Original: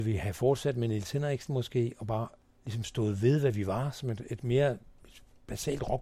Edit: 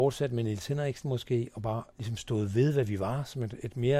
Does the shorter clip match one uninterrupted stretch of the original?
no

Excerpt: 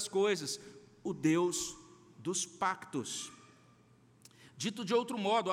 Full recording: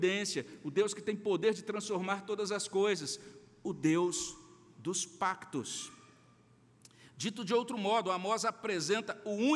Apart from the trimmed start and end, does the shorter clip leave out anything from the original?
no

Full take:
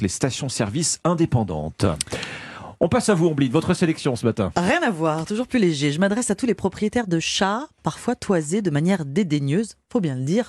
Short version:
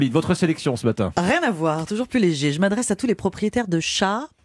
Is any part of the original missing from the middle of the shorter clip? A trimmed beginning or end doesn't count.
no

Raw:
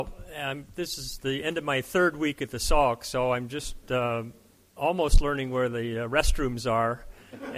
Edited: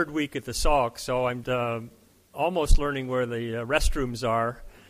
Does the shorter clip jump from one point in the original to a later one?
yes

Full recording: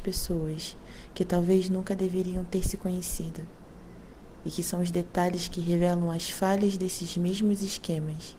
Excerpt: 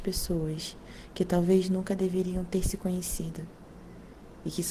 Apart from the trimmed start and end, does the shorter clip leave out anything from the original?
no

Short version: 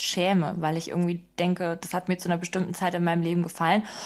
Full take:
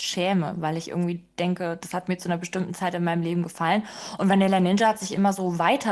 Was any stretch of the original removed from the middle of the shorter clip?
no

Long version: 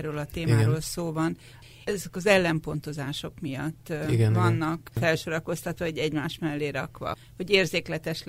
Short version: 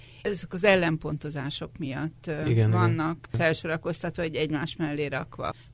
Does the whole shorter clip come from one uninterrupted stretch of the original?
yes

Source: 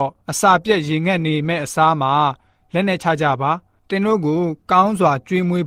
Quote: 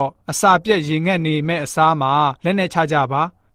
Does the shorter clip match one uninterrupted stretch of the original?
no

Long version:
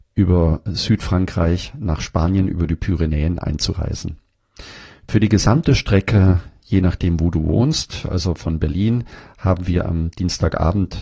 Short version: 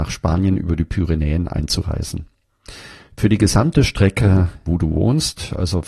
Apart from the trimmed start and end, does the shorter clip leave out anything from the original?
yes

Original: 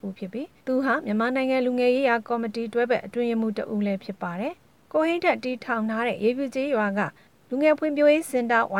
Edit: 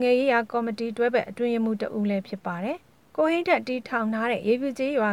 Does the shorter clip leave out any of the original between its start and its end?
no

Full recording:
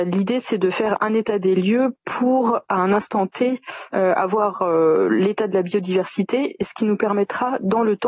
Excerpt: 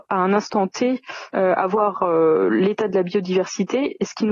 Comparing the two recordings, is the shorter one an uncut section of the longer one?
yes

